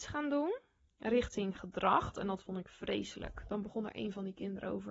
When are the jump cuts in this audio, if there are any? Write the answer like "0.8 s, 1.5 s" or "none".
2.1 s